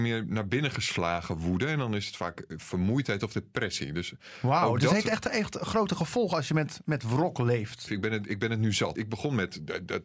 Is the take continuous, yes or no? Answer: no